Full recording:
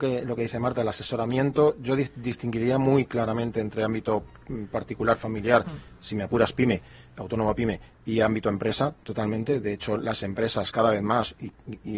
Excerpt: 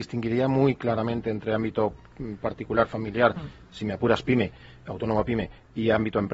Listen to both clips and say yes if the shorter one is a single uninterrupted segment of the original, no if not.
yes